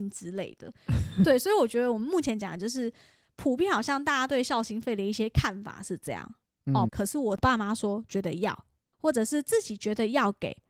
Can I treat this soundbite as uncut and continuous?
no; 1 cut; at 6.9 s

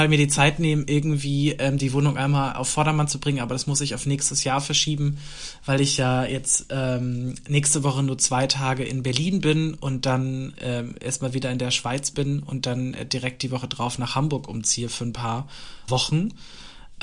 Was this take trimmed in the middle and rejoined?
yes; 2 cuts; at 10.5 s, 15.9 s

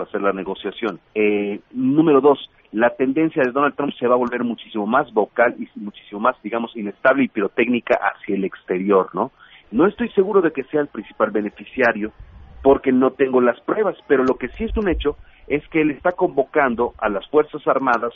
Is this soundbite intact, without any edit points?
no; 2 cuts; at 1.1 s, 9.6 s

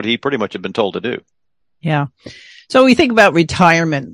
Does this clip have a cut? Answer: no; 0 cuts

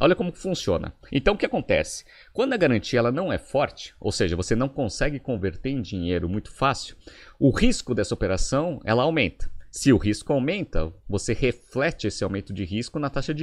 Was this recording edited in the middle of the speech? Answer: yes; 1 cut; at 1.1 s

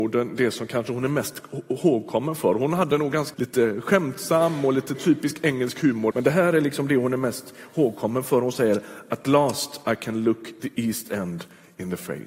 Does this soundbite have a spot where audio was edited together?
yes; 2 cuts; at 3.3 s, 6.1 s

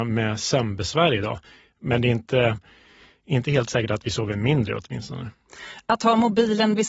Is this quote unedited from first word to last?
yes; 0 cuts

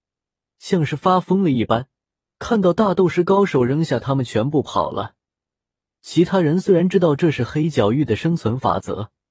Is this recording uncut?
no; 1 cut; at 2.3 s

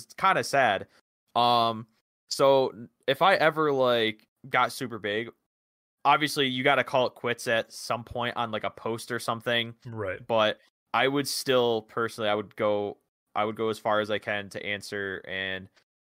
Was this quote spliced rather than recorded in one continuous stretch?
no; 0 cuts

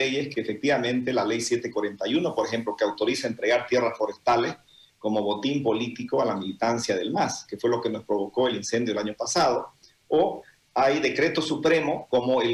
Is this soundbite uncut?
yes; 0 cuts

